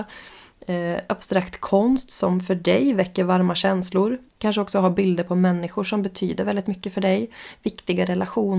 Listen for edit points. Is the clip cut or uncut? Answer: cut